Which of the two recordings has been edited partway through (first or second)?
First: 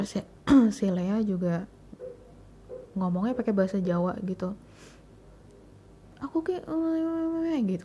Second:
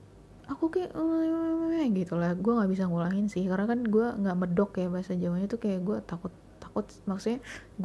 second